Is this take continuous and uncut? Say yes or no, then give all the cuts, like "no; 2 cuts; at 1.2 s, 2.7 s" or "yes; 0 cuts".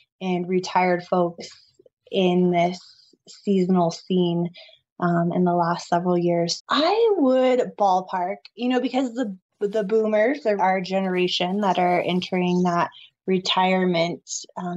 no; 2 cuts; at 6.6 s, 10.6 s